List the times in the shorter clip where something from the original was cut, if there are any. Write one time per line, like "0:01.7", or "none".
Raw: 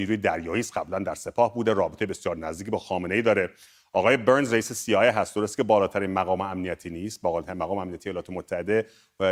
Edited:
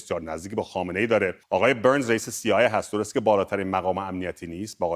0:01.4

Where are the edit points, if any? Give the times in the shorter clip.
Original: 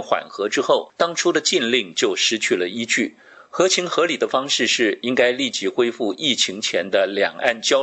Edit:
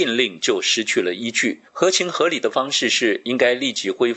0:01.7

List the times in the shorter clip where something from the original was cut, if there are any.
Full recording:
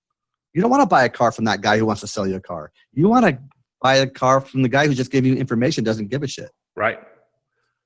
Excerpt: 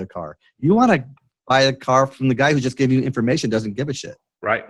none

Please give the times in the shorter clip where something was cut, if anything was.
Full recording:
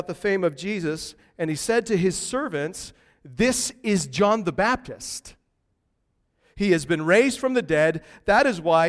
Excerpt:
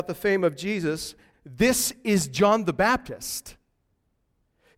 0:01.3

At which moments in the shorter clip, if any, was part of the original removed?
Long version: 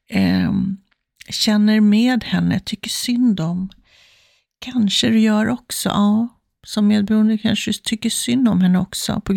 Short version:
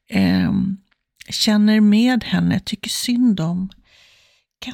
none

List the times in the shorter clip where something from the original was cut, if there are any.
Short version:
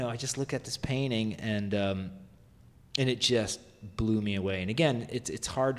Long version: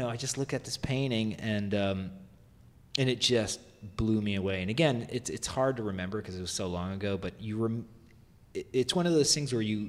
none

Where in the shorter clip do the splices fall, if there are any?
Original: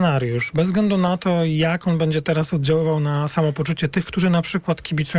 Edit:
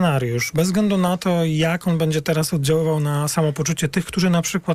none

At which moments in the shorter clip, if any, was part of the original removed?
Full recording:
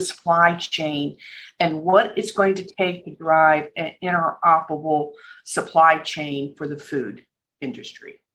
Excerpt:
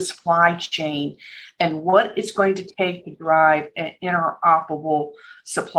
none

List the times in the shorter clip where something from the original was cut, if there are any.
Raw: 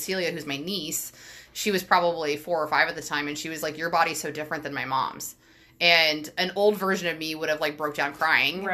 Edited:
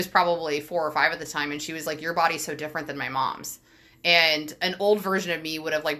none

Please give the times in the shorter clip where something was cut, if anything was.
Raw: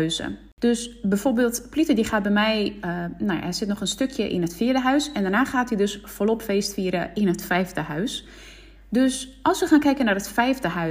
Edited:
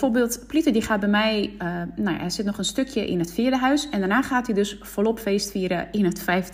none

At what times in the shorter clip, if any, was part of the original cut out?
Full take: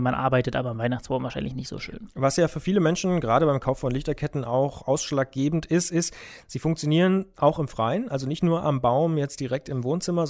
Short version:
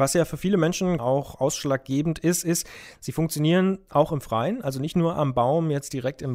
0:01.0

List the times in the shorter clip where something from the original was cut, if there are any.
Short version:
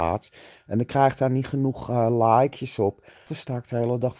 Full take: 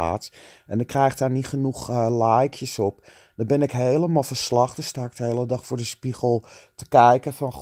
0:03.3

